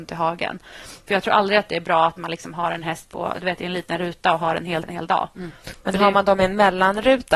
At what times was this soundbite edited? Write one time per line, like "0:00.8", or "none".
0:04.8